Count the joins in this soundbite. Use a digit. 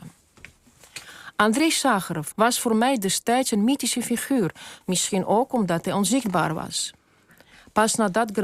2